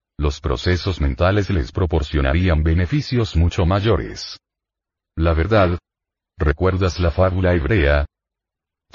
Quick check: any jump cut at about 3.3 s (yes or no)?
no